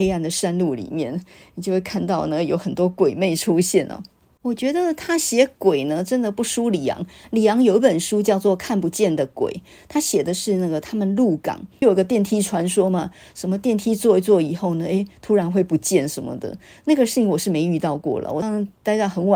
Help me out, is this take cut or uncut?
cut